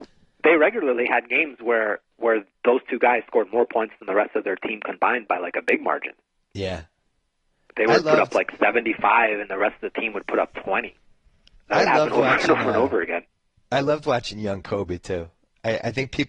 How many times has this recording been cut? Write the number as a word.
zero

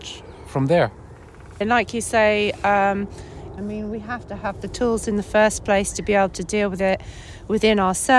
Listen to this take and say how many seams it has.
two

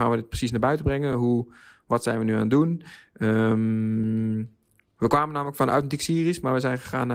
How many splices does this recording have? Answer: zero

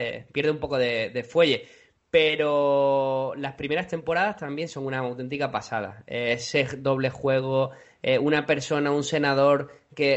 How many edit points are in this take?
zero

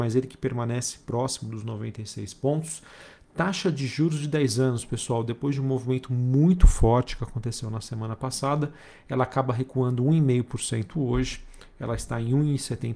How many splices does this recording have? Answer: zero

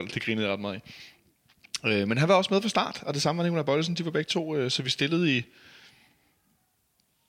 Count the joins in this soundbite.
zero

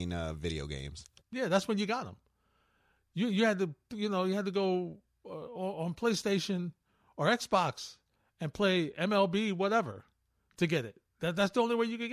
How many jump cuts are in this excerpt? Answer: zero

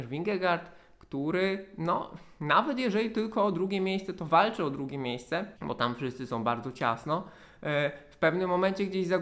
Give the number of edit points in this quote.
one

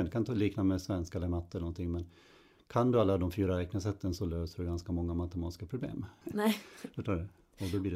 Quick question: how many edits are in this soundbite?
one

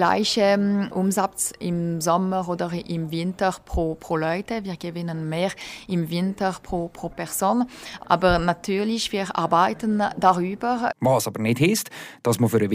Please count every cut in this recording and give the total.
two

